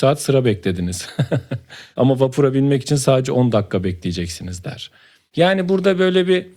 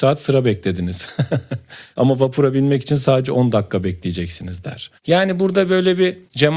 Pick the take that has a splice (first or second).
second